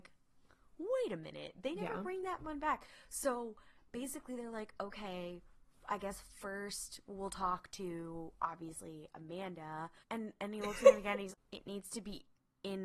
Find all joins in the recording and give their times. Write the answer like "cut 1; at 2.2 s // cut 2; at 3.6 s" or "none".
cut 1; at 10.0 s // cut 2; at 11.3 s